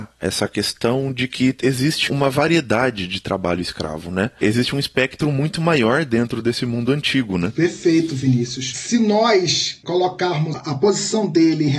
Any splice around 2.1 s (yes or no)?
yes